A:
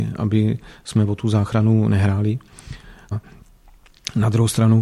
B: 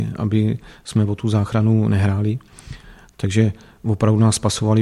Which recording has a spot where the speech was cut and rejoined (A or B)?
A